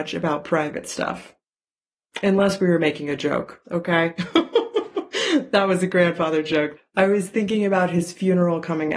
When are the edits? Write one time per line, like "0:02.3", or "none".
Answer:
0:03.6
0:06.8